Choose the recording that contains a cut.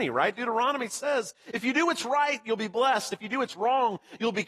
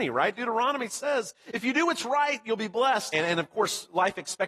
second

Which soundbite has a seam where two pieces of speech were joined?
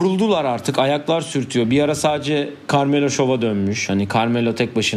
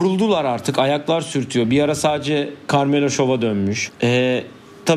second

